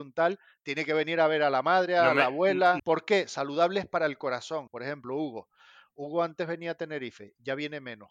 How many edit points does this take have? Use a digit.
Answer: 2